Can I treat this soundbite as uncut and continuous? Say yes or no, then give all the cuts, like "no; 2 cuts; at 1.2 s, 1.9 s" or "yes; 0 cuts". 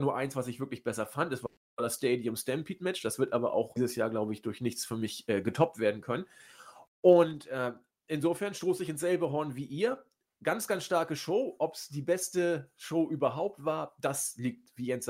yes; 0 cuts